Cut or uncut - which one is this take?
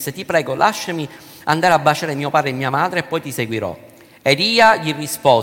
uncut